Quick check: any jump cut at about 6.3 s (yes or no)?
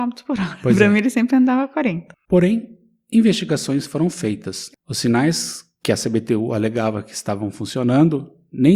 no